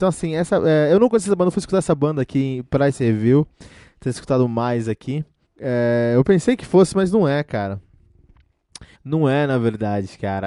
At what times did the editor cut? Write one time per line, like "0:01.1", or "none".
0:05.4
0:08.9